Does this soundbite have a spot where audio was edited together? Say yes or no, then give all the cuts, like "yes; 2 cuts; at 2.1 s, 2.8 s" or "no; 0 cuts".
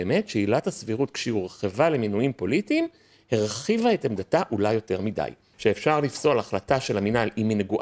yes; 1 cut; at 5.5 s